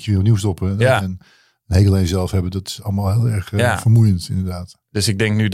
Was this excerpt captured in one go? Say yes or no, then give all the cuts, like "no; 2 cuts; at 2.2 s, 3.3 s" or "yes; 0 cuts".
no; 1 cut; at 1.0 s